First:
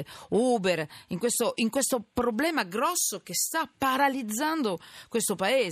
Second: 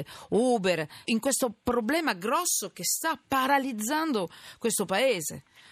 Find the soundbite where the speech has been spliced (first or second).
second